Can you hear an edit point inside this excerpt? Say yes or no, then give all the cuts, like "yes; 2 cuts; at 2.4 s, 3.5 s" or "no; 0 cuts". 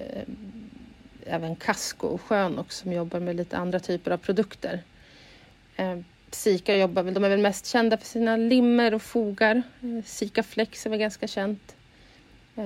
no; 0 cuts